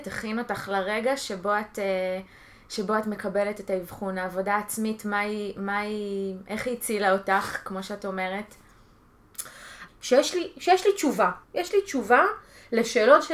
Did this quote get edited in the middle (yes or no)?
yes